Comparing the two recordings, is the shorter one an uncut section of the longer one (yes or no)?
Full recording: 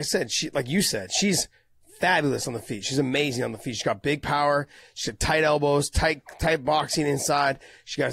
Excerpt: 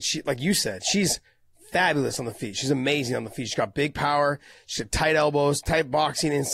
no